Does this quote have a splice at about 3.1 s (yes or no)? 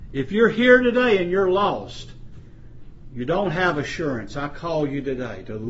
yes